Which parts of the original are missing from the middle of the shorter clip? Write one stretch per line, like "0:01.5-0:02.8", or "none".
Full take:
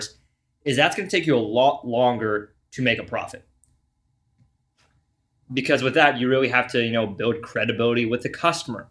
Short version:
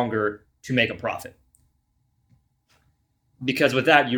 none